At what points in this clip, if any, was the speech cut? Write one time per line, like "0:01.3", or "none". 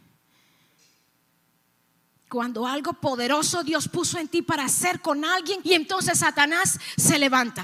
0:02.2
0:05.6